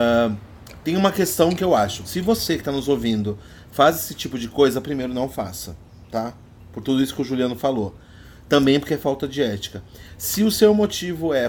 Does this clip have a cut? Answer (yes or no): yes